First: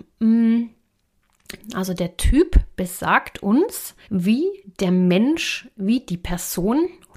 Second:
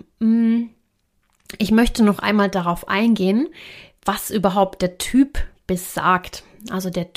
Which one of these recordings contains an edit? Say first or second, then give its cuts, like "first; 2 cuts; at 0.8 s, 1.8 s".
first; 2 cuts; at 1.6 s, 4.0 s